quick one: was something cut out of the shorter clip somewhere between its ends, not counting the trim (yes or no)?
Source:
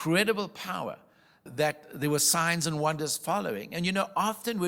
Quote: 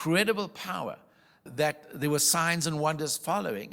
no